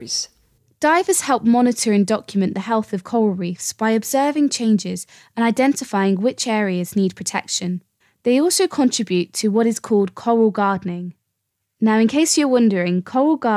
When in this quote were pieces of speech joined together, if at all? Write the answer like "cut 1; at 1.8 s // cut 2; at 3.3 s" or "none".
none